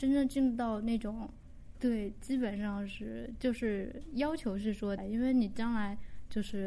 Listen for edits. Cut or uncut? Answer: cut